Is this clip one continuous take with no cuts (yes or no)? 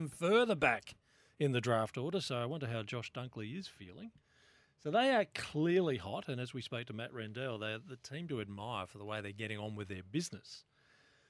yes